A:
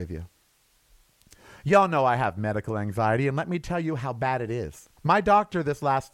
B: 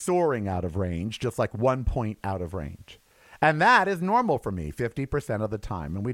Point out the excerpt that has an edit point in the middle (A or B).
A